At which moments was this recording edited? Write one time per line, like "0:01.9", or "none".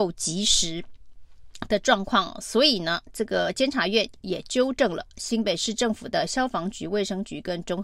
none